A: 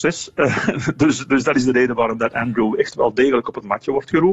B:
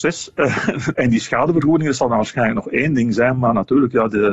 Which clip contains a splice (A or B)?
B